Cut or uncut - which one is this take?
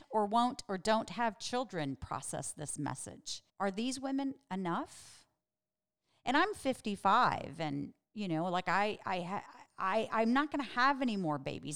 cut